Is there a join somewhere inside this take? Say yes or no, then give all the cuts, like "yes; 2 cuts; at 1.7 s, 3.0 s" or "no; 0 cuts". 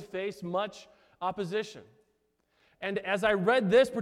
no; 0 cuts